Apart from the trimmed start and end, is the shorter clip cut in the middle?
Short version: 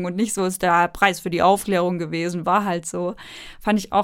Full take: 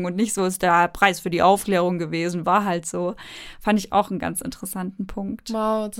no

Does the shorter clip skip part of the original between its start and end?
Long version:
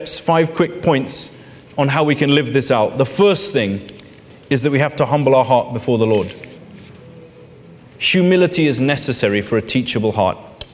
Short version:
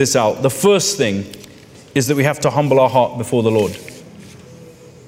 no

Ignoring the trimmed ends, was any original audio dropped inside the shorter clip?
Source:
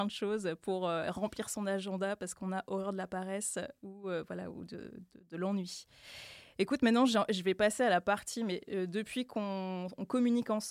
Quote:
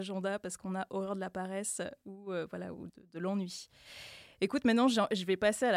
yes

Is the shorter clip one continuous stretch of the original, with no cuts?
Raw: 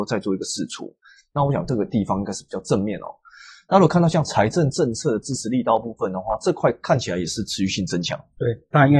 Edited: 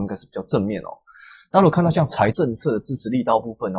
no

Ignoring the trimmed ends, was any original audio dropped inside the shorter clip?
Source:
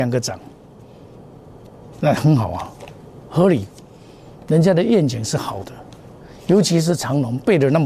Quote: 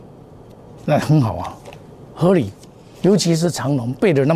yes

